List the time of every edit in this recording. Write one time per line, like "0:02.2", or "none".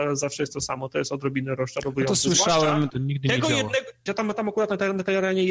0:02.9
0:04.1

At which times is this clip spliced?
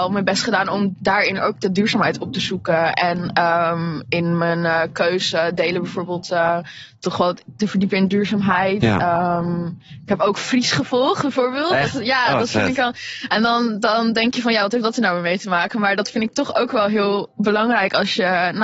none

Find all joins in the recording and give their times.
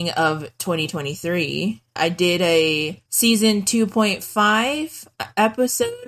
0:02.0
0:03.1

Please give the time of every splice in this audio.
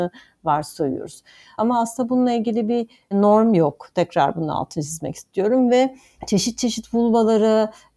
none

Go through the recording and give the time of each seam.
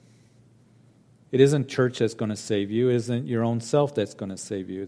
0:01.3

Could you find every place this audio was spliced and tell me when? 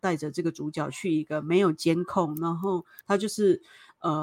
0:03.0

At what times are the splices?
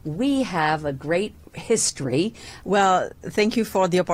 0:02.6

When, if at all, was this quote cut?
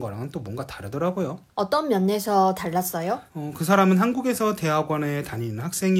0:03.3

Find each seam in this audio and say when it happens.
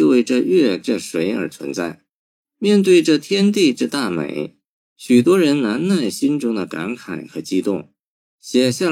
0:02.4

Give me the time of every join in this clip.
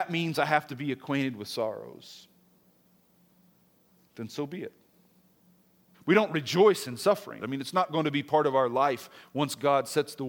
0:05.9
0:07.4

